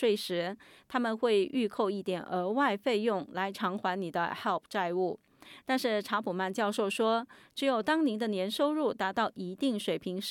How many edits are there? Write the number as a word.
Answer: zero